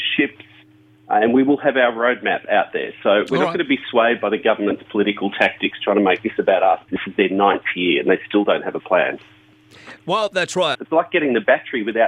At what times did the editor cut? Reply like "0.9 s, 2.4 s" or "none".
6.9 s, 10.7 s